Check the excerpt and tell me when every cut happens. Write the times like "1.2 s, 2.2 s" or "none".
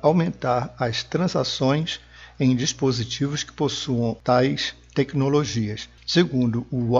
none